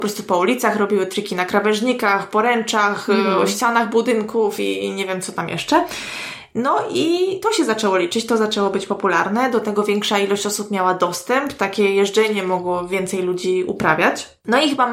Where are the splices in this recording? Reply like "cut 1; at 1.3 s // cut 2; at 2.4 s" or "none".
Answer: none